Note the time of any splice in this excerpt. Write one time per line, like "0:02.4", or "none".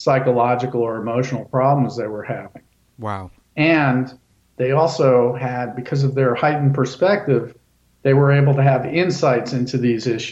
0:03.4